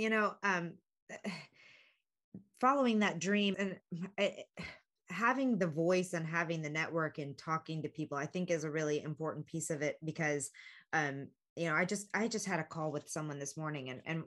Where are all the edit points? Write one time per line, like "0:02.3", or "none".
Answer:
0:03.5